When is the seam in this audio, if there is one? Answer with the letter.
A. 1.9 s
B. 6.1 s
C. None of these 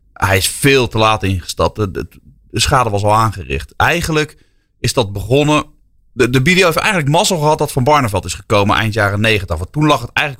C